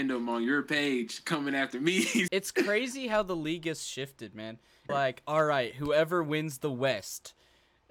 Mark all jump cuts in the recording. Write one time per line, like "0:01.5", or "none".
0:02.3
0:04.9